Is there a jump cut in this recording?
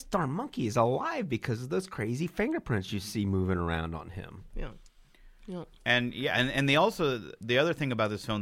no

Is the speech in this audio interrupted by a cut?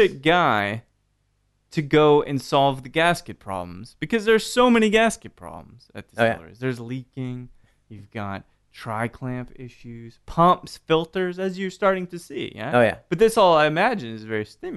no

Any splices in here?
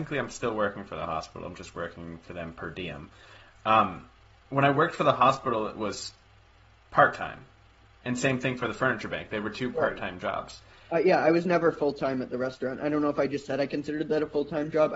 no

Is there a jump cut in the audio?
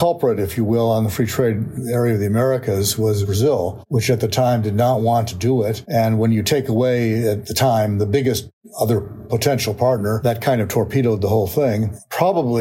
no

